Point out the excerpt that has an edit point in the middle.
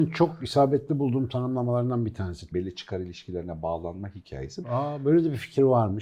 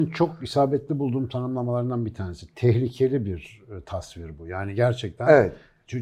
first; 2 cuts; at 2.5 s, 4.6 s

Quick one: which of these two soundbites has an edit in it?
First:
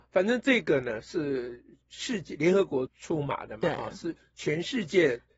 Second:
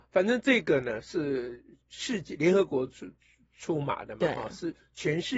first; 1 cut; at 2.9 s

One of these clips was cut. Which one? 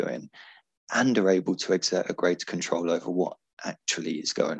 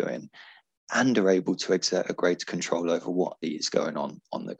second; 1 cut; at 3.4 s

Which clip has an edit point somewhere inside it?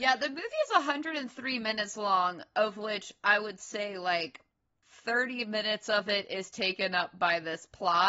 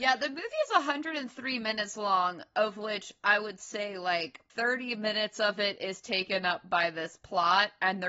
second; 1 cut; at 4.5 s

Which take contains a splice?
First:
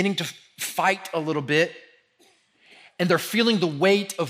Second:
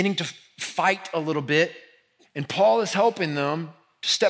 second; 1 cut; at 2.2 s

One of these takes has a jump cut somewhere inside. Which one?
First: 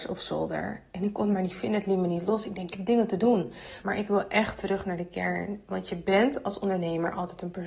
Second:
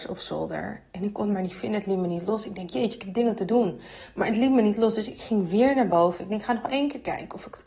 first; 2 cuts; at 2.7 s, 3.8 s

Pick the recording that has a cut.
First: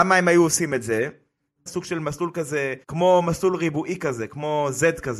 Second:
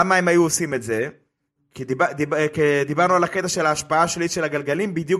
first; 2 cuts; at 1.7 s, 2.8 s

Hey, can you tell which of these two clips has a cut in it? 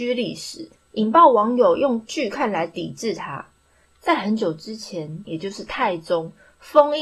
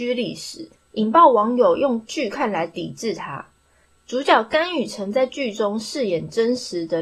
first; 2 cuts; at 3.9 s, 5.2 s

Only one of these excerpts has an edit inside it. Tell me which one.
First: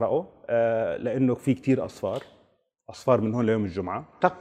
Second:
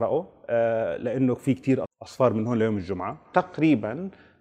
second; 1 cut; at 1.9 s

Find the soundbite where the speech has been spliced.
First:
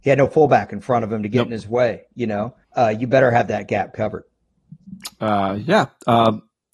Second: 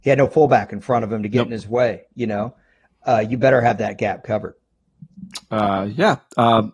first; 1 cut; at 2.6 s

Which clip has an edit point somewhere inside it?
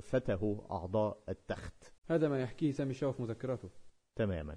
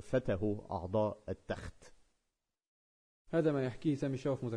first; 1 cut; at 2.0 s

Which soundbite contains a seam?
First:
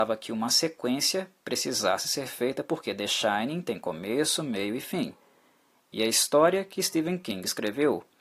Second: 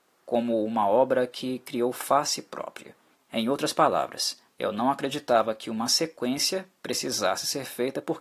second; 2 cuts; at 3.1 s, 4.5 s

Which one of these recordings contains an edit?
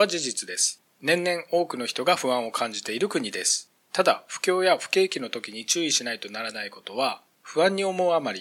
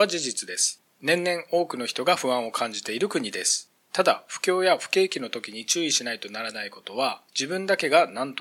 second; 1 cut; at 7.3 s

